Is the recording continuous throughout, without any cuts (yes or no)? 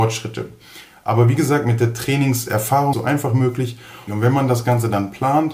no